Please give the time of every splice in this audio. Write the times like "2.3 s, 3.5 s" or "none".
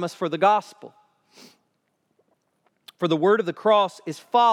none